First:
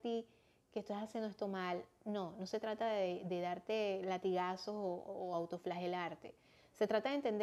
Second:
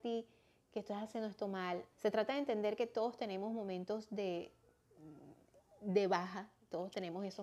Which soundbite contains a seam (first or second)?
second